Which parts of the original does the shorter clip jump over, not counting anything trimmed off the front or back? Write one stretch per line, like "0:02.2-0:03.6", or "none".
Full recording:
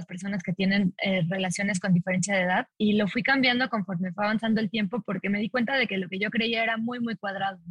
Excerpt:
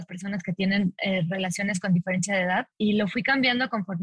none